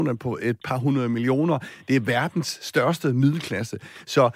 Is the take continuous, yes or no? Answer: yes